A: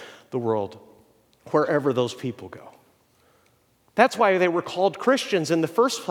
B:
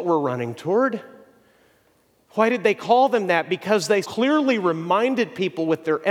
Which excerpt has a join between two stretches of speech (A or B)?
B